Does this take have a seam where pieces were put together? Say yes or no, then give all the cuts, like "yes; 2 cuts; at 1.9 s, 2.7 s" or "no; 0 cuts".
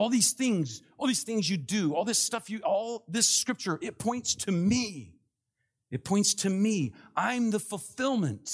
no; 0 cuts